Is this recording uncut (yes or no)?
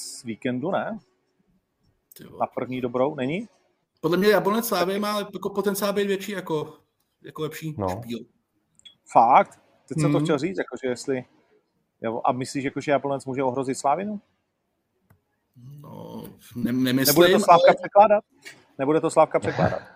yes